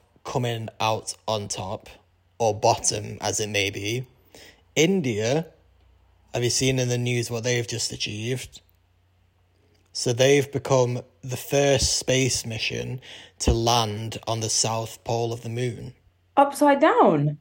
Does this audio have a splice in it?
no; 0 cuts

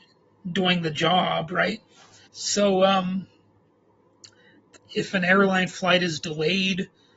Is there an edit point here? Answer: yes; 2 cuts; at 2.3 s, 4.8 s

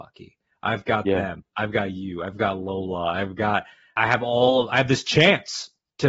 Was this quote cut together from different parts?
no; 0 cuts

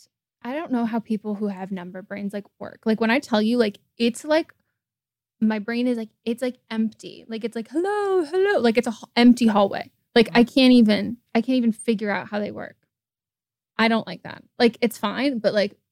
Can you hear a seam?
yes; 2 cuts; at 11.3 s, 13.7 s

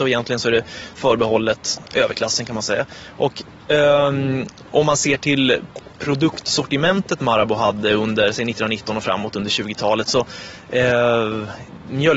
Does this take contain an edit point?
no; 0 cuts

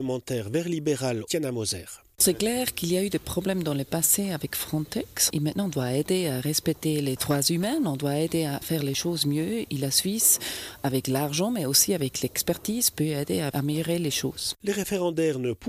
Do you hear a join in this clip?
yes; 1 cut; at 5.3 s

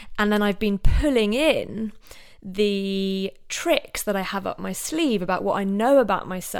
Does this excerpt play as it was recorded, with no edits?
yes; 0 cuts

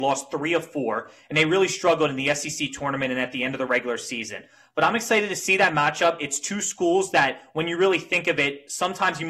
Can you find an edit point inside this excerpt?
no; 0 cuts

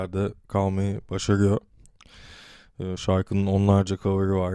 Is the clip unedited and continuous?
yes; 0 cuts

